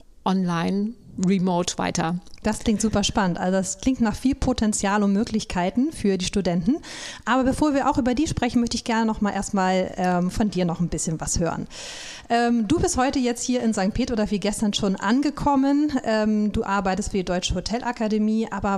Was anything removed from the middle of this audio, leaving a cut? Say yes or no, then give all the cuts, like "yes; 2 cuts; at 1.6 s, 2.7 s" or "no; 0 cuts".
no; 0 cuts